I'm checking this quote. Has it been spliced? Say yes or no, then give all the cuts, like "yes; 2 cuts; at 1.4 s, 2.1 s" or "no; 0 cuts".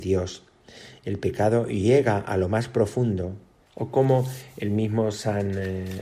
yes; 1 cut; at 3.7 s